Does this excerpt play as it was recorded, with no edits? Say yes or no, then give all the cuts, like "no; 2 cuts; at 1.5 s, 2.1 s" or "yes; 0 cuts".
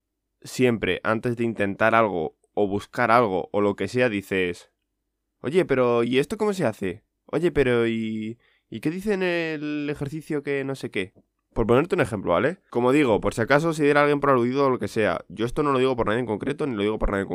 yes; 0 cuts